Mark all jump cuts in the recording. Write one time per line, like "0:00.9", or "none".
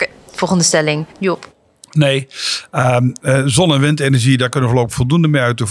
0:01.1